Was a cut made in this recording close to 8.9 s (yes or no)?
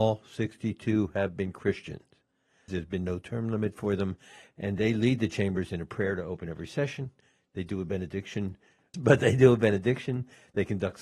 yes